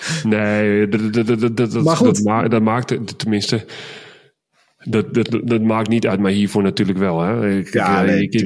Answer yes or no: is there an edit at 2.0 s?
no